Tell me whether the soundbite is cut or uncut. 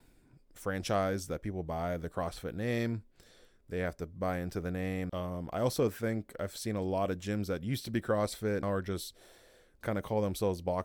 cut